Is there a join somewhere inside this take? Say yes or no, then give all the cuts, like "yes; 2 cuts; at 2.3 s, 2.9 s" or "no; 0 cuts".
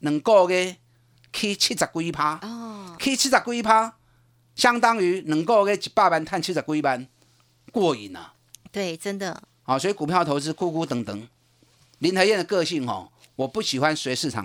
no; 0 cuts